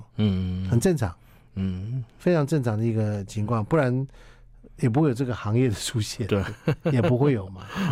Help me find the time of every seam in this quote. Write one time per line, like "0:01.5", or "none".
none